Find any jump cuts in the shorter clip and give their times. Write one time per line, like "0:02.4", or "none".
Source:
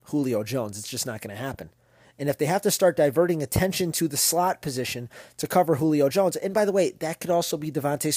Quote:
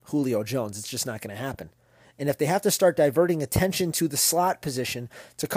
none